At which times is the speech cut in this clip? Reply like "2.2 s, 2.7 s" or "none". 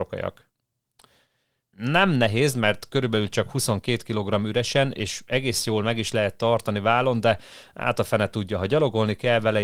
1.6 s